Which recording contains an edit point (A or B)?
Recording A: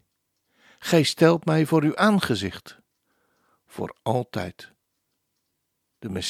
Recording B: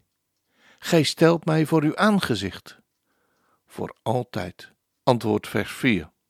B